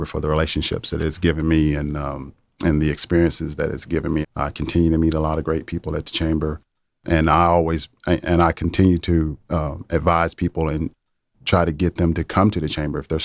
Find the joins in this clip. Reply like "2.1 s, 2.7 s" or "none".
4.2 s